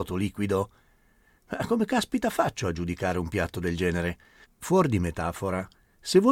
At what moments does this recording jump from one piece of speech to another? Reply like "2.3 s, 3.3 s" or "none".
4.4 s